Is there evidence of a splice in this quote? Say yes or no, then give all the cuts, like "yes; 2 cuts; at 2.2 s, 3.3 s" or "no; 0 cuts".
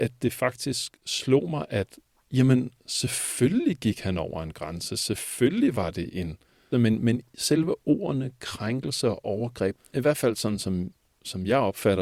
yes; 2 cuts; at 6.7 s, 9.8 s